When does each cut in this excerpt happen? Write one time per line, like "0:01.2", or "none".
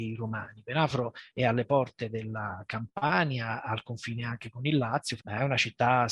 0:05.2